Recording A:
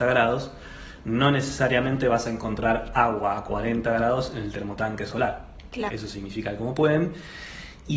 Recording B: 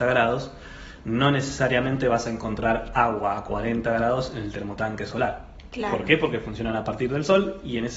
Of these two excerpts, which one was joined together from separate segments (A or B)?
A